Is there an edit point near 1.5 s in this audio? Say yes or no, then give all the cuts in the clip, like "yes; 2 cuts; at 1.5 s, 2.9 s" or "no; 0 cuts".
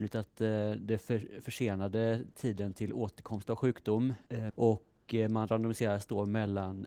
no; 1 cut; at 4.5 s